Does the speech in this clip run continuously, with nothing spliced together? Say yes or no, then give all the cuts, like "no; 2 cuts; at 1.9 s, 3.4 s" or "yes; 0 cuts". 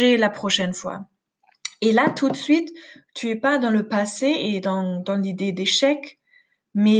yes; 0 cuts